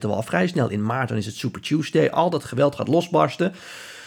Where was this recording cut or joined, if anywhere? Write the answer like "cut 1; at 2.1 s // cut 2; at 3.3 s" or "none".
none